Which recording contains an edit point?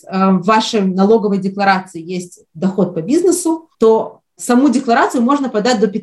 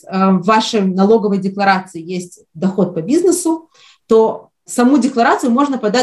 first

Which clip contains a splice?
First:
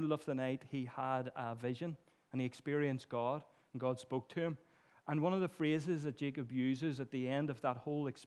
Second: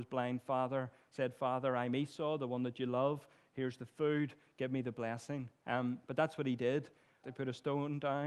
second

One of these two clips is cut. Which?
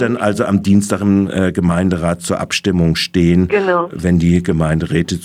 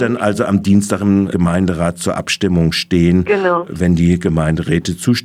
second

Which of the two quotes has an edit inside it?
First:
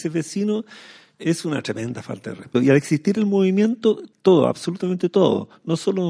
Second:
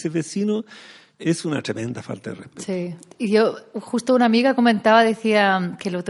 first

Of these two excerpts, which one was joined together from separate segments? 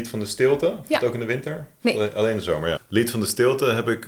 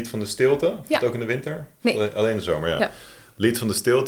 first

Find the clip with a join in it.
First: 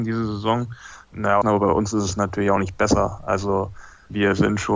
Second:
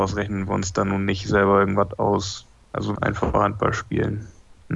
first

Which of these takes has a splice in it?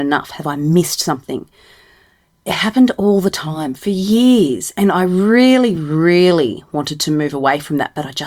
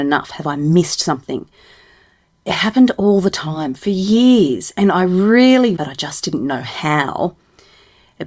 second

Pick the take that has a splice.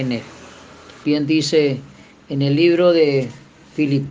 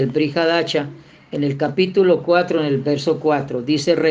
first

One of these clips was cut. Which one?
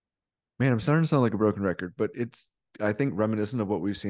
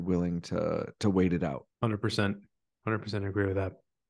second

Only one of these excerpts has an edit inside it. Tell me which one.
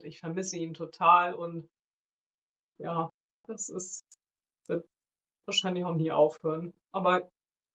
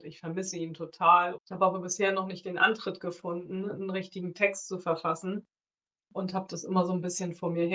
second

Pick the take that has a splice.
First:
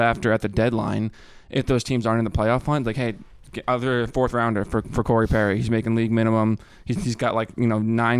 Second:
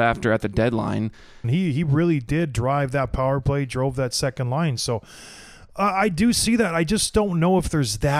second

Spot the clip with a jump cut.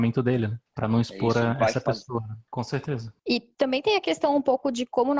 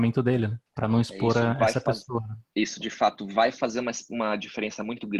first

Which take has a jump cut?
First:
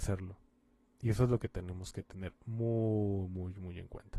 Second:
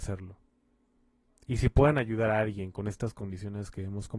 first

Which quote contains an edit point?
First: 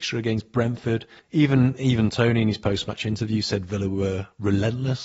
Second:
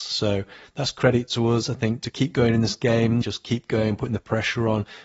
second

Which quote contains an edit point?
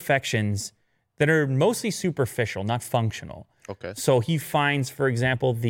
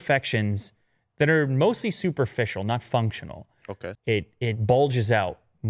second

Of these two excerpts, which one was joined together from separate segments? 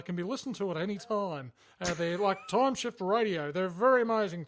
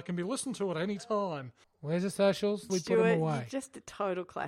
second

